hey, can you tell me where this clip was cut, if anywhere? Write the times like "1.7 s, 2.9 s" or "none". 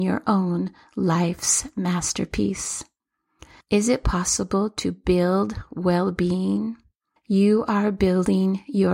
3.6 s, 7.2 s